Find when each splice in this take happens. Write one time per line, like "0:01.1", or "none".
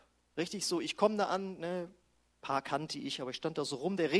none